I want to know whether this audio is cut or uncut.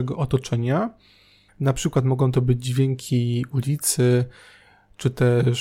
cut